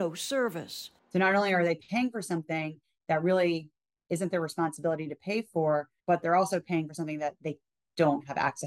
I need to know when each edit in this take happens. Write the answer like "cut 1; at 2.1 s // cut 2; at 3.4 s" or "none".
cut 1; at 4.0 s // cut 2; at 6.0 s